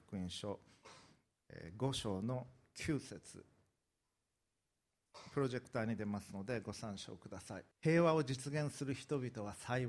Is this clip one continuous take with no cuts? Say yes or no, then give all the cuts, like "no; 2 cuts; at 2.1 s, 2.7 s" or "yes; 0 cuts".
no; 1 cut; at 7.7 s